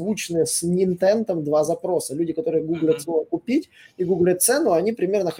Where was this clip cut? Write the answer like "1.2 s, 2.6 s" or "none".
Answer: none